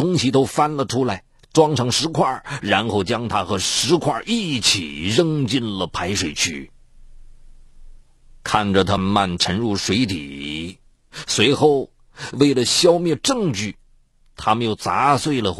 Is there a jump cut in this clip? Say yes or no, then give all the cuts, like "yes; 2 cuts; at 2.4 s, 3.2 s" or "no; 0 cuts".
yes; 1 cut; at 9.0 s